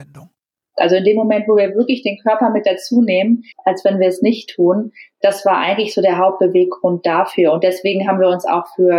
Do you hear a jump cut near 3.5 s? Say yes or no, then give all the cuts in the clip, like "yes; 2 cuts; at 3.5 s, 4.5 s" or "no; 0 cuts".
yes; 1 cut; at 3.5 s